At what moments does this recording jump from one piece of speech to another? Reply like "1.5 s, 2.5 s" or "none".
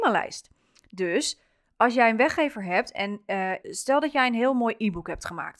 3.6 s